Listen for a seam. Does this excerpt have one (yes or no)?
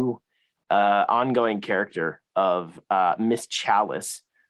no